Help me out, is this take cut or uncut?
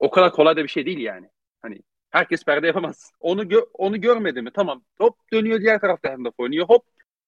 cut